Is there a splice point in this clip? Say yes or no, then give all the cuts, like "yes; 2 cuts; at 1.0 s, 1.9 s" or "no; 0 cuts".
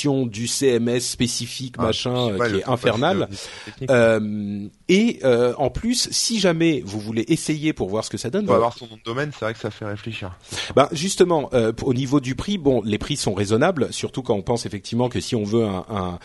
yes; 1 cut; at 8.5 s